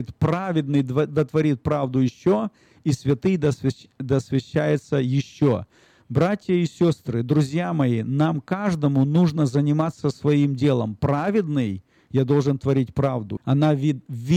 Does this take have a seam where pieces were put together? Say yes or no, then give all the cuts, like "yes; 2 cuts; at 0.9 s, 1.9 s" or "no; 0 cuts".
yes; 1 cut; at 13.4 s